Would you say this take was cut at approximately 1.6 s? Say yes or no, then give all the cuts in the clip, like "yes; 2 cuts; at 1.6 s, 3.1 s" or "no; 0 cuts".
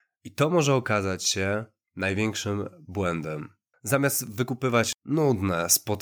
no; 2 cuts; at 3.7 s, 4.9 s